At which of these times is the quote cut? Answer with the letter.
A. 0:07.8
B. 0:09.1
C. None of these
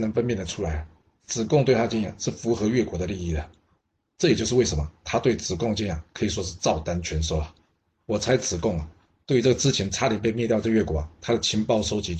A